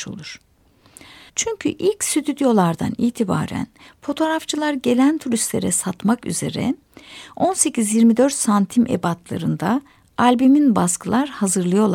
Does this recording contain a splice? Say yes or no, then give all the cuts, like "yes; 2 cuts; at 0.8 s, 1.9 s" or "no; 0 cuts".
yes; 1 cut; at 1.3 s